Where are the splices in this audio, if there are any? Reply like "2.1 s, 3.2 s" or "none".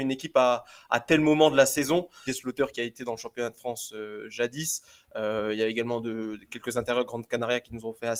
2.3 s